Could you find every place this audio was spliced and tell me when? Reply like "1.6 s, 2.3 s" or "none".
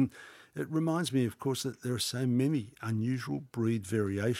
none